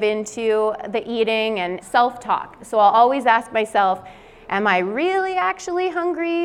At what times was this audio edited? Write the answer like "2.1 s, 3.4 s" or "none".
1.8 s